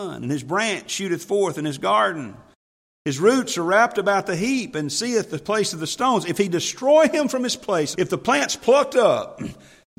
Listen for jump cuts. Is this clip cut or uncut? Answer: cut